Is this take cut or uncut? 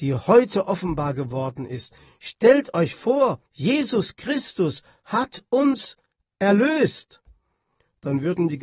cut